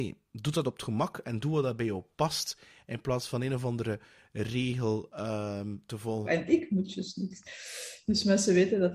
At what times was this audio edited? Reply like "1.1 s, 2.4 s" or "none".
6.2 s

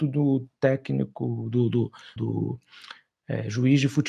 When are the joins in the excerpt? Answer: 2.2 s

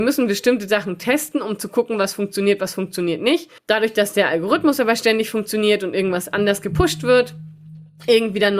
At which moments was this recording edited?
3.6 s

